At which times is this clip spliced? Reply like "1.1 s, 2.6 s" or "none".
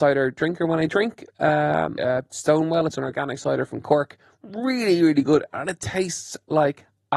2.0 s